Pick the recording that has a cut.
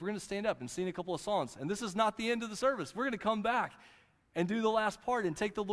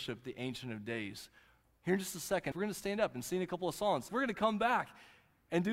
second; 2 cuts; at 2.5 s, 4.1 s

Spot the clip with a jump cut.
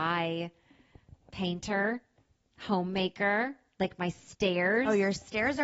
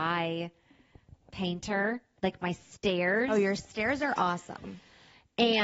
second; 1 cut; at 2.2 s

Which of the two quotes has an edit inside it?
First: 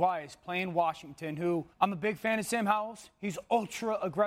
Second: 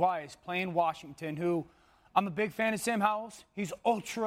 first; 1 cut; at 1.7 s

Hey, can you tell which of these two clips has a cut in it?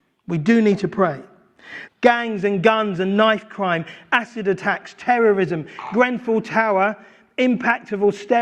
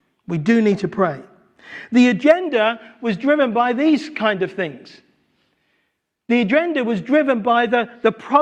first; 1 cut; at 1.9 s

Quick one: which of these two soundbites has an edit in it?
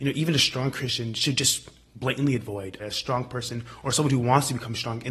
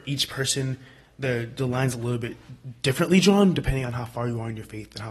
first; 1 cut; at 2.8 s

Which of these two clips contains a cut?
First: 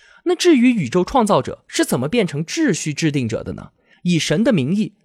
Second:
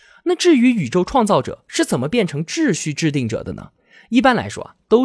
first; 1 cut; at 3.9 s

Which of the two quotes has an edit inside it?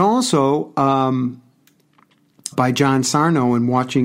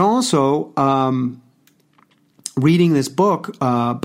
first; 1 cut; at 2.5 s

